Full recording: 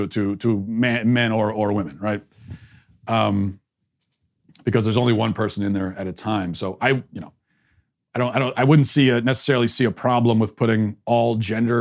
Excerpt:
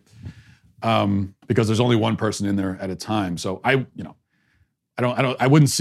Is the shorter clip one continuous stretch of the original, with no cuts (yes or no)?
no